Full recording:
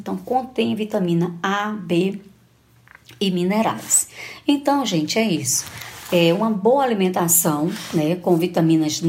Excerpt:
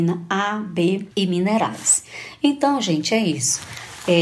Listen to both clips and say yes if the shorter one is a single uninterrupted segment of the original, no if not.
no